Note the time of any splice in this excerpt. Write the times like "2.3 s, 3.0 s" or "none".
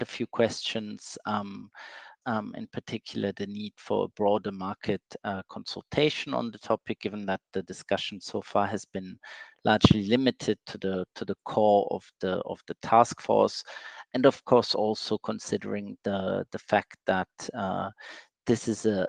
2.2 s